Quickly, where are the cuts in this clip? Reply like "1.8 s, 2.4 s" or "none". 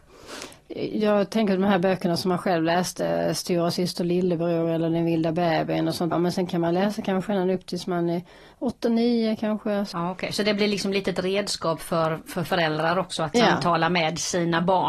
6.1 s, 9.9 s